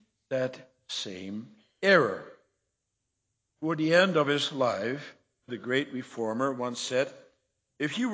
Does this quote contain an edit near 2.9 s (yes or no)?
no